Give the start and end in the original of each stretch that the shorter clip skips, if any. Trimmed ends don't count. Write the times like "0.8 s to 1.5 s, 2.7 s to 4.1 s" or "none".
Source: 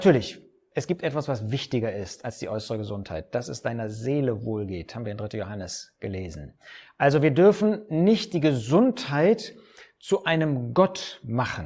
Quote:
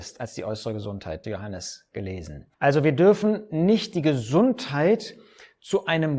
3.3 s to 5.3 s, 6.6 s to 6.9 s